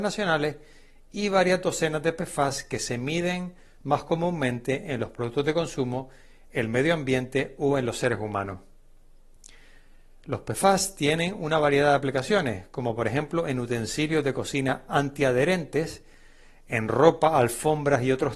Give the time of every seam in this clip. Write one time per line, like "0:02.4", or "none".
none